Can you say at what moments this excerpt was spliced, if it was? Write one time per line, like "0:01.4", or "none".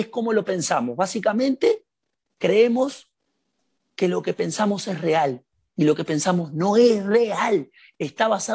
none